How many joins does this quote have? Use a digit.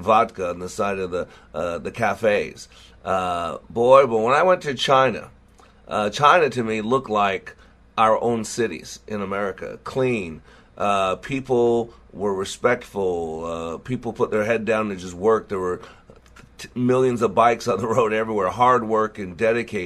0